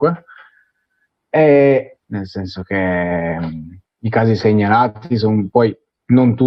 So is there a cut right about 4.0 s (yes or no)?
no